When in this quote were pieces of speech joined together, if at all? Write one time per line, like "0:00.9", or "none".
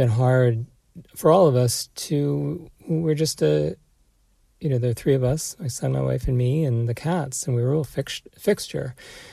none